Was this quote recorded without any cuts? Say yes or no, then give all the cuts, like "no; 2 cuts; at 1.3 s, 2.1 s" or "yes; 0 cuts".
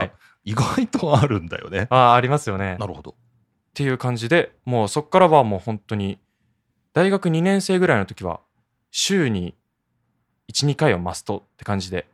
no; 1 cut; at 2.8 s